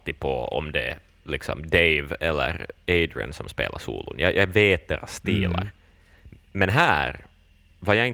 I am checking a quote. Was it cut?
no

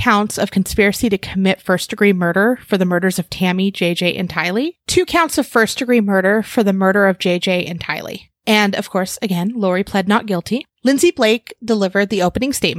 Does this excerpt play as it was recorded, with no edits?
yes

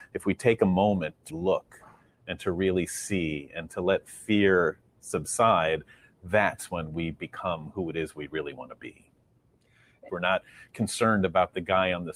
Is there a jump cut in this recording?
yes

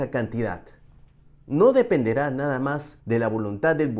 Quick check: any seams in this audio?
yes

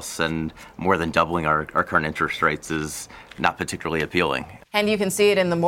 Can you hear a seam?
yes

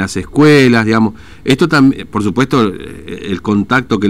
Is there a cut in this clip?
no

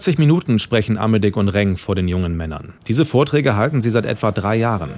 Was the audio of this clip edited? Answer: yes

